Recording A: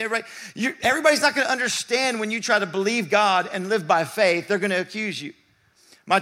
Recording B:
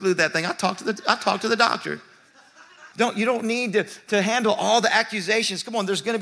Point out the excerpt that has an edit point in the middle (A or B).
B